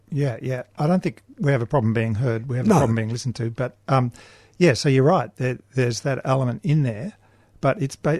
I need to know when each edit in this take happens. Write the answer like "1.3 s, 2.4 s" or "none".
none

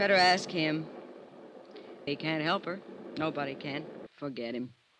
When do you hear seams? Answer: 2.1 s, 4.1 s

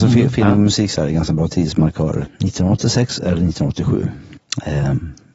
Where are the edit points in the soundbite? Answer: 2.3 s

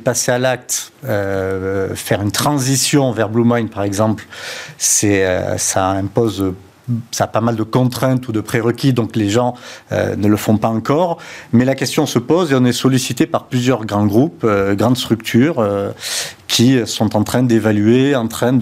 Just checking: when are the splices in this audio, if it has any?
none

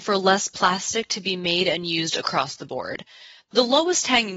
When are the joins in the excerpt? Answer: none

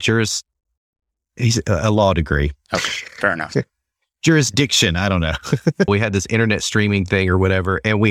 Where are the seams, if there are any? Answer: 5.9 s

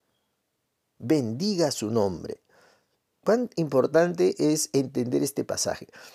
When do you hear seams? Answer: 1.0 s

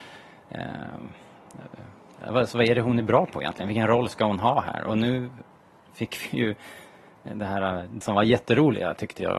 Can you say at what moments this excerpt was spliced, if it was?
8.0 s

